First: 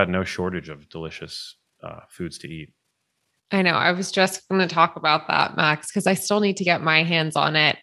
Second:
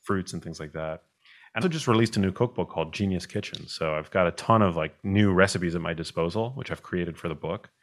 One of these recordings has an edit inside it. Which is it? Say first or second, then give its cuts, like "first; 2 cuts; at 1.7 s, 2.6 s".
second; 1 cut; at 1.6 s